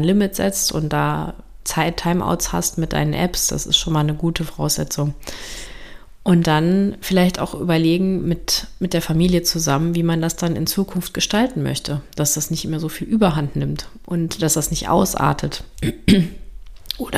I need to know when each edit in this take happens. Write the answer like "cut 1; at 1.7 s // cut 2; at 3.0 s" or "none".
none